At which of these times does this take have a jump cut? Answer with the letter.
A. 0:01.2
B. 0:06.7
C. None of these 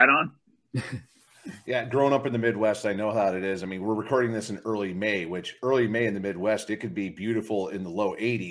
C